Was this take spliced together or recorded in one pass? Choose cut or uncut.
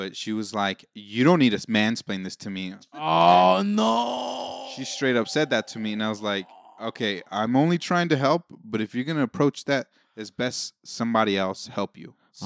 uncut